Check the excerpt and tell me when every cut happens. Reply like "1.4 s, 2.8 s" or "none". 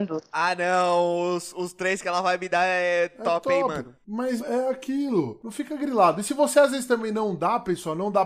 4.4 s, 5.4 s